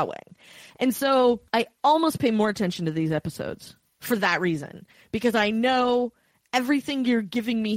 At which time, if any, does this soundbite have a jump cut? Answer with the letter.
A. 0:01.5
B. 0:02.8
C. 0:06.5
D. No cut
A